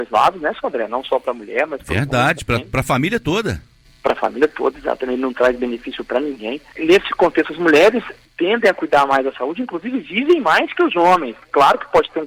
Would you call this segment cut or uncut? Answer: uncut